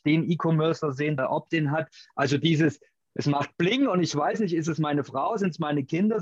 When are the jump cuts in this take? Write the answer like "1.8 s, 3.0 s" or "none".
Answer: 1.2 s